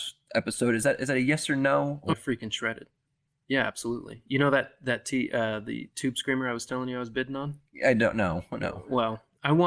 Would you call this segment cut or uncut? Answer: cut